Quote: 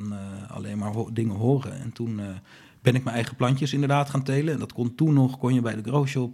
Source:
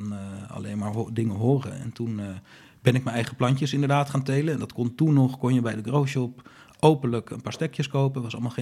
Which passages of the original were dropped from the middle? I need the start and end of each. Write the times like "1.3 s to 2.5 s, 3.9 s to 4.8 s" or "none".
none

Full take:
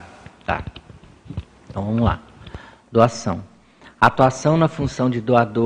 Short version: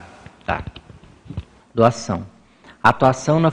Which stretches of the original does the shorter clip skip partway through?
1.6 s to 2.8 s

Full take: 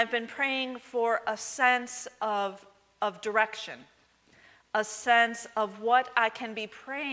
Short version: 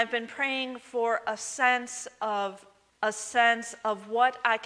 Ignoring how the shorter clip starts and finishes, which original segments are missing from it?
2.9 s to 4.6 s

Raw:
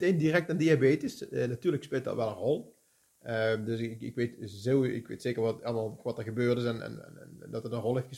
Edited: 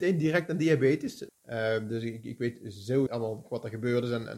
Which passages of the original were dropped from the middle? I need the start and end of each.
1.3 s to 3.1 s, 4.8 s to 5.6 s

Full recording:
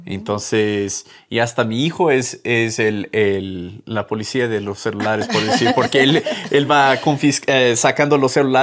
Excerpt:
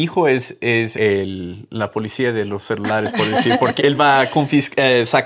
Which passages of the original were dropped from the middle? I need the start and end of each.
2.8 s to 3.1 s, 5.9 s to 6.5 s

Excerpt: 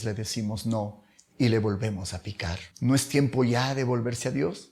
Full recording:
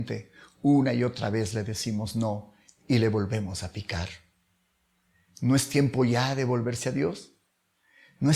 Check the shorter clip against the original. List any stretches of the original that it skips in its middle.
4.2 s to 5.3 s

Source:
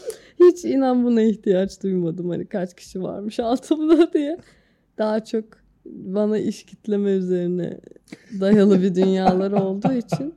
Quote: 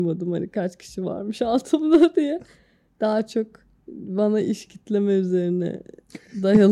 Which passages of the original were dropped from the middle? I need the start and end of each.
none

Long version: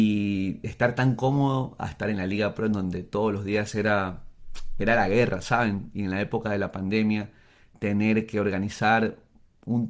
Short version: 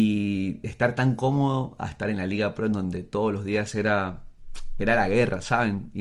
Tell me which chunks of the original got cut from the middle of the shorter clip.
none

